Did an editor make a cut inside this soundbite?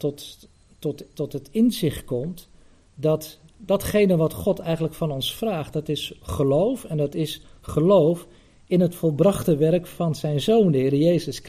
yes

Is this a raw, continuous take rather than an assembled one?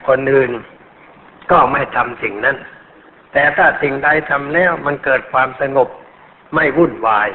yes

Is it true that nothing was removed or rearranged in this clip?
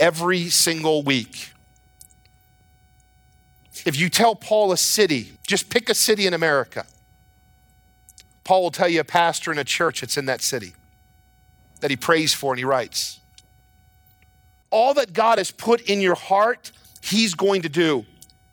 no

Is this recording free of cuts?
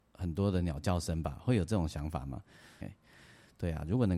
no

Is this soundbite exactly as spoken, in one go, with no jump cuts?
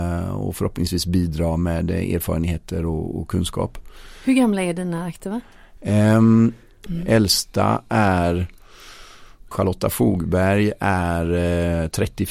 no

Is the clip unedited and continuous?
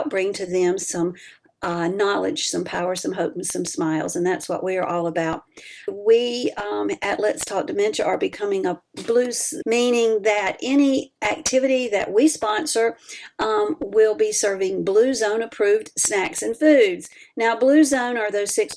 no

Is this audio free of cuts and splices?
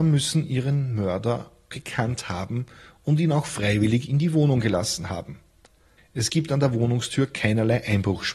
no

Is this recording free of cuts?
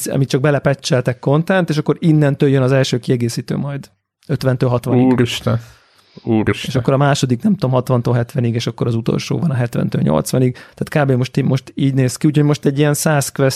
yes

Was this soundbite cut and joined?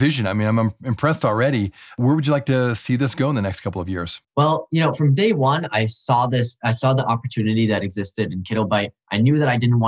yes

